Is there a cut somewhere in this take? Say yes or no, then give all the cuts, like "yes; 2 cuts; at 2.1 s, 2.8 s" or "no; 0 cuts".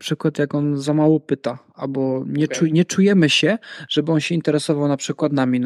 no; 0 cuts